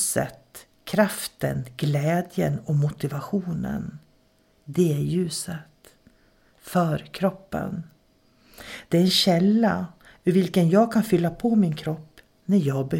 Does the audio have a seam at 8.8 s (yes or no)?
no